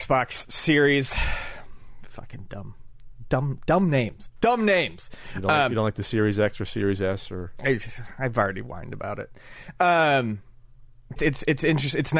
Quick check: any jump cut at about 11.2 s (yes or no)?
yes